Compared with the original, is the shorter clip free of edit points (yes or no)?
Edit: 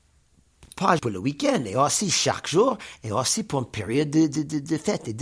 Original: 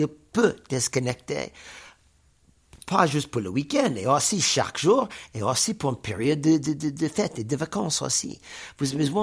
no